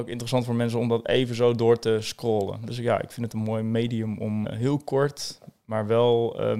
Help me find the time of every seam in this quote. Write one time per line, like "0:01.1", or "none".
0:04.4